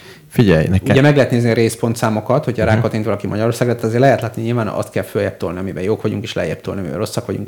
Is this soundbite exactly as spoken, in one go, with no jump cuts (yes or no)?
yes